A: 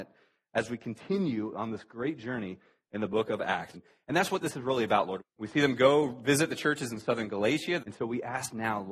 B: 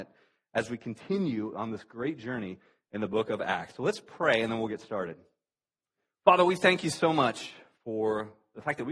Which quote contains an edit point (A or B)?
A